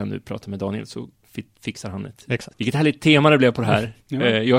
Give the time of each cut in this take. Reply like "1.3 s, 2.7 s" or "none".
2.5 s